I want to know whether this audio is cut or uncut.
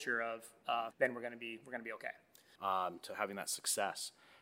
cut